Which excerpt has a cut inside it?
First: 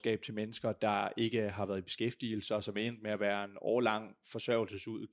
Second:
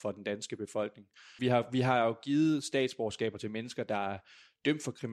second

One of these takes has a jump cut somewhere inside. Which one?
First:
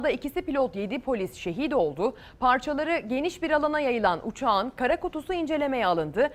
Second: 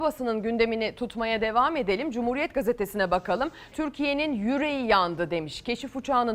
second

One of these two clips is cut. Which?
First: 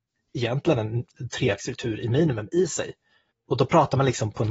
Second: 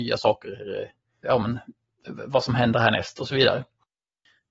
second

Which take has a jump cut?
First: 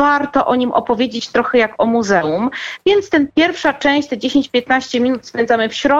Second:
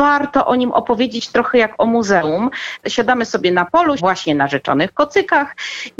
second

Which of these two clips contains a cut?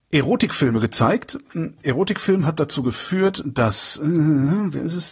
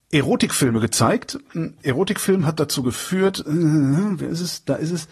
second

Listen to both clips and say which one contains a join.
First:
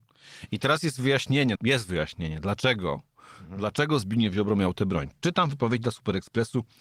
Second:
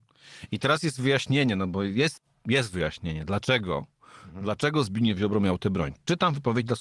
first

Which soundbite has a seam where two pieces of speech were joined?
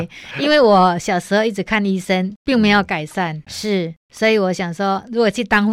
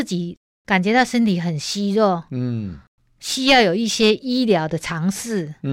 first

